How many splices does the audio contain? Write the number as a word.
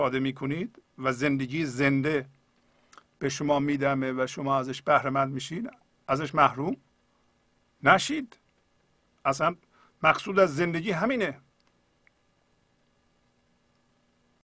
zero